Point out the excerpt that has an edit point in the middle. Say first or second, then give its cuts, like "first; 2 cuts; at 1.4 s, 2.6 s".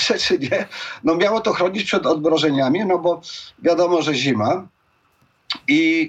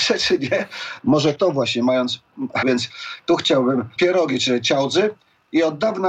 second; 3 cuts; at 1.0 s, 2.6 s, 4.0 s